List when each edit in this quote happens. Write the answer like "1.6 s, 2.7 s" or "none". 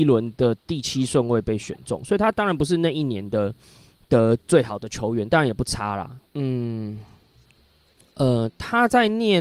6.3 s